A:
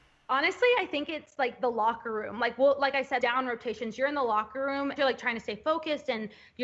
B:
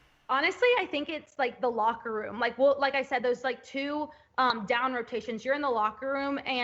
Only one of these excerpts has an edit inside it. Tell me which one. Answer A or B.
A